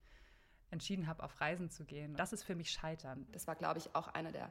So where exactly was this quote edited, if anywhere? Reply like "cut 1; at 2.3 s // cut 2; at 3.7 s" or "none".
cut 1; at 2.2 s // cut 2; at 3.3 s